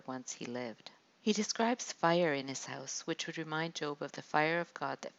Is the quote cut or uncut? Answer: cut